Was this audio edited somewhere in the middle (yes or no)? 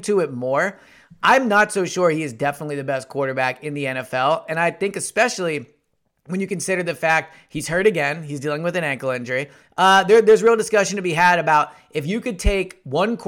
no